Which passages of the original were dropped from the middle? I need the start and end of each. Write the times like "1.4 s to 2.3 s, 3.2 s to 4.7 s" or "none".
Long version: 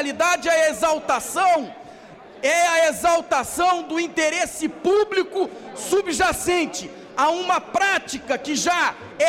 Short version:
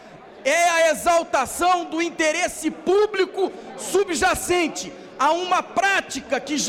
none